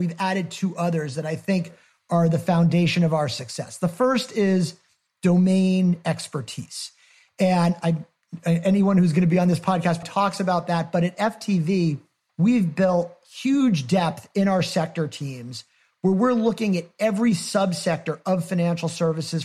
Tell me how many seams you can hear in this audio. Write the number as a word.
two